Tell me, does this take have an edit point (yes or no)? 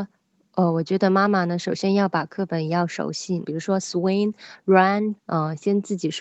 yes